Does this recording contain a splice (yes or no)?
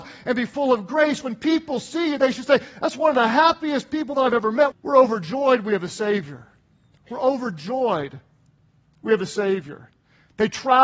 yes